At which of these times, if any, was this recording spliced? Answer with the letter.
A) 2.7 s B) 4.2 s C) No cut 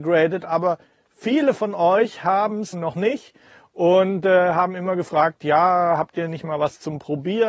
A